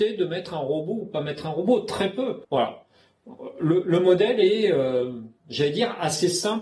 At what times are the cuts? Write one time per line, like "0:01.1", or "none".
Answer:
0:02.4